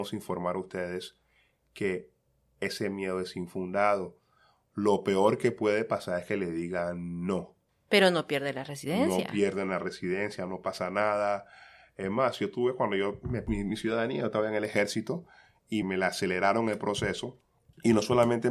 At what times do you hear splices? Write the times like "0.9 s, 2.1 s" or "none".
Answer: 15.8 s

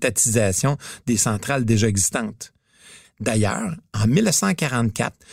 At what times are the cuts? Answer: 3.0 s

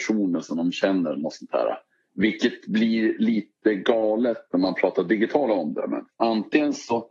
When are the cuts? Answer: 2.1 s, 6.1 s

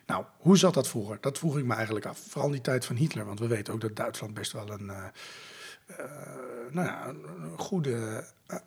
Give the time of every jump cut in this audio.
none

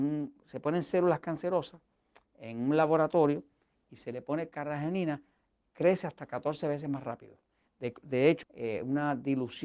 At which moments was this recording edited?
8.4 s

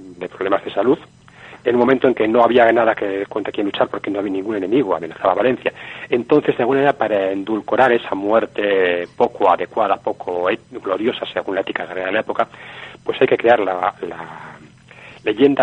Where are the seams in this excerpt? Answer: none

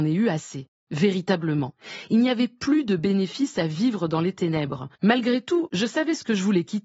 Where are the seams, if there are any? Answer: 5.0 s

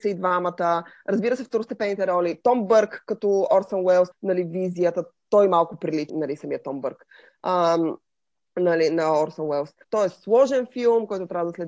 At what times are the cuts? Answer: 4.1 s, 6.1 s, 9.8 s

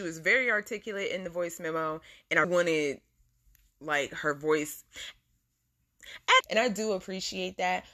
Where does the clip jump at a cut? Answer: 2.4 s, 6.4 s

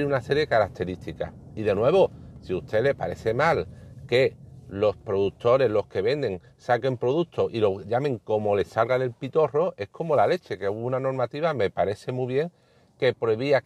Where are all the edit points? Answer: none

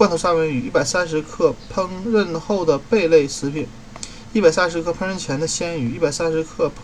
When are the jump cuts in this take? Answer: none

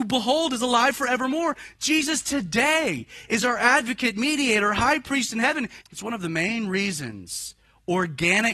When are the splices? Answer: 5.8 s

